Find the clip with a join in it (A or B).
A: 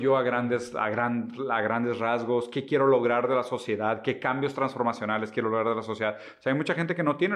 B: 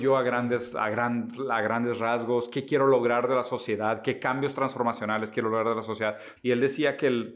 B